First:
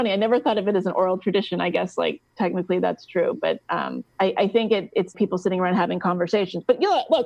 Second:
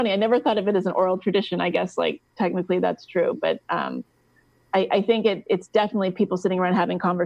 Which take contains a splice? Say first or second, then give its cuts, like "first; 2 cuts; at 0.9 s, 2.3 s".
first; 2 cuts; at 4.1 s, 5.1 s